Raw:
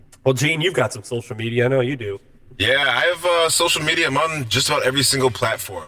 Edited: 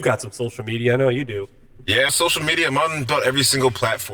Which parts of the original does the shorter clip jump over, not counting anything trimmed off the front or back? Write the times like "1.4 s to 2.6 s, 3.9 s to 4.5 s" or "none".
2.8 s to 3.5 s, 4.5 s to 4.7 s